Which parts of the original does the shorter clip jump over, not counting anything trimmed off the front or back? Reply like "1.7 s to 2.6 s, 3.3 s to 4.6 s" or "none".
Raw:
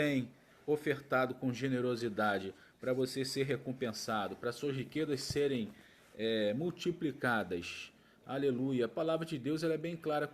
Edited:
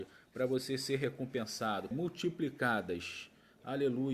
4.4 s to 6.5 s